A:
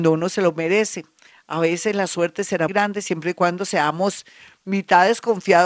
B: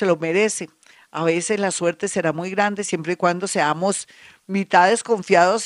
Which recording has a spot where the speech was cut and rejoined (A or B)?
A